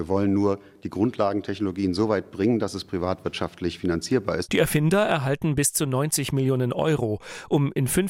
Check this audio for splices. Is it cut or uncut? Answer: cut